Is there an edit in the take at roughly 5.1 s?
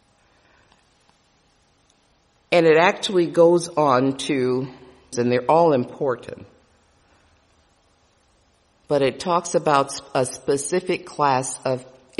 yes; 1 cut; at 5.1 s

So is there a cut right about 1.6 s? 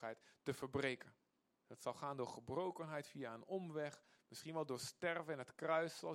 yes; 1 cut; at 1.6 s

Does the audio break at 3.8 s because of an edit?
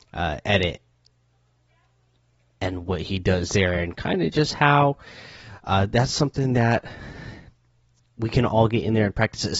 no; 0 cuts

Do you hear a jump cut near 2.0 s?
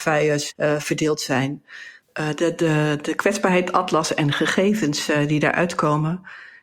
yes; 1 cut; at 2.0 s

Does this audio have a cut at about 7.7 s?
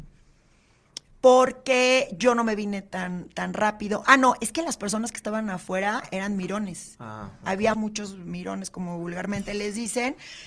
yes; 1 cut; at 7.7 s

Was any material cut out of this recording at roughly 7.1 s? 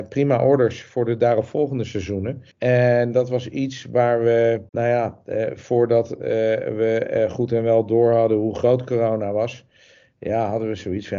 no; 2 cuts; at 2.5 s, 4.7 s

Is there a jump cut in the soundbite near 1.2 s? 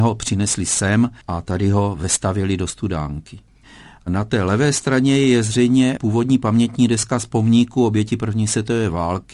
yes; 1 cut; at 1.2 s

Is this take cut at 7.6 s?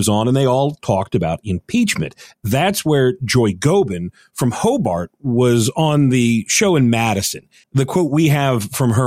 yes; 1 cut; at 7.6 s

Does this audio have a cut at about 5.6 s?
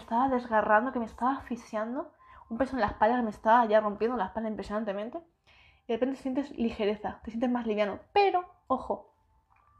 no; 0 cuts

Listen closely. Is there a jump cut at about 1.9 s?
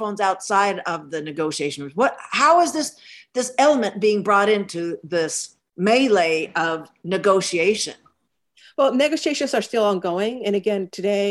no; 0 cuts

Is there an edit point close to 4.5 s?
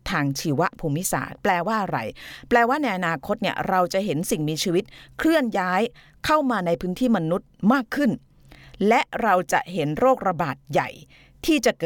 no; 0 cuts

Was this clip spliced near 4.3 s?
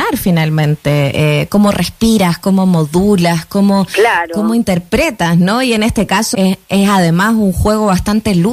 no; 1 cut; at 6.3 s

